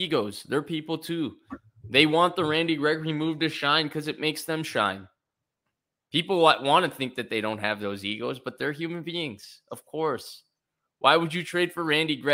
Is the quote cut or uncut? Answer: uncut